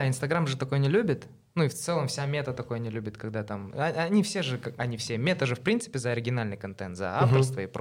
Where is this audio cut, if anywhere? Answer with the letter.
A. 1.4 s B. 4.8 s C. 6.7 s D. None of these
B